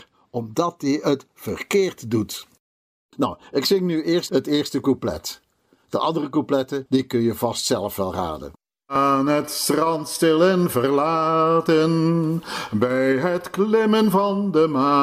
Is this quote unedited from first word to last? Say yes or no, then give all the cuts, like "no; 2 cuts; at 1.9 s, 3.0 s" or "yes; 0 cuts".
no; 1 cut; at 4.3 s